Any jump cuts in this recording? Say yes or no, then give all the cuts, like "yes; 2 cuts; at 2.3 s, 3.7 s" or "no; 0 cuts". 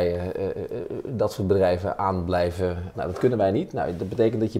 yes; 1 cut; at 2.9 s